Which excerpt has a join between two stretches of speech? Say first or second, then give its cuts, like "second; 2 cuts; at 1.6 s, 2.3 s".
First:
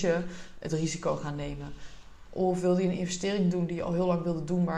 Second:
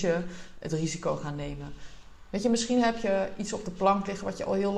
first; 1 cut; at 2.2 s